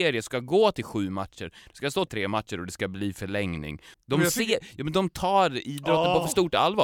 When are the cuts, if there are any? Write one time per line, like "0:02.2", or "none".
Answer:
0:02.1
0:03.9